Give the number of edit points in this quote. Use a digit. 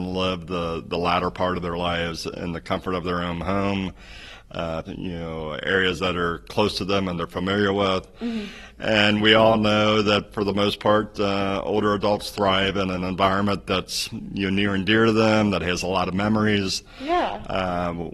1